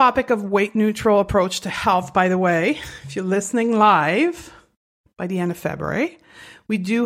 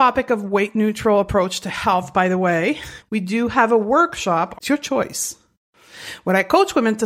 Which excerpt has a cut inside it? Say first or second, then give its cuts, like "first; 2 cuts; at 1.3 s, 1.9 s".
second; 2 cuts; at 3.0 s, 4.5 s